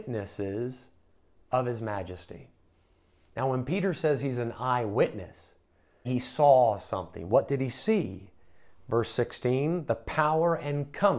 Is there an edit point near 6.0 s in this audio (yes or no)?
yes